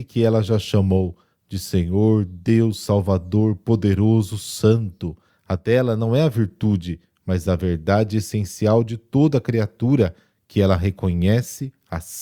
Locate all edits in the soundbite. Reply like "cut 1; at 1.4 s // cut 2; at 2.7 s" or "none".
cut 1; at 5.3 s

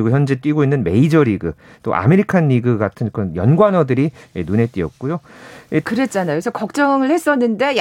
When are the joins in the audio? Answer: cut 1; at 5.8 s

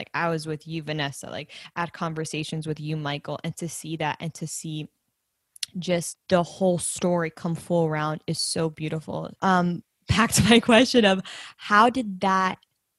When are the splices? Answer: cut 1; at 6.1 s // cut 2; at 9.3 s

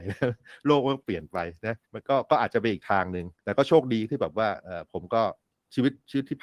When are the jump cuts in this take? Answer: cut 1; at 1.8 s // cut 2; at 3.4 s

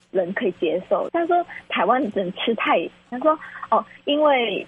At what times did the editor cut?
cut 1; at 1.1 s // cut 2; at 3.1 s

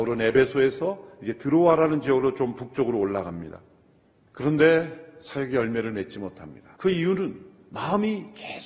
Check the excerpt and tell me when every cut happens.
cut 1; at 4.3 s // cut 2; at 6.7 s

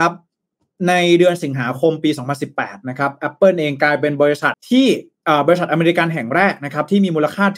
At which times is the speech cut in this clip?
cut 1; at 4.5 s

